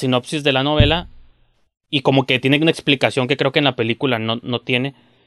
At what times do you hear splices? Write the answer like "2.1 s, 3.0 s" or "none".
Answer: none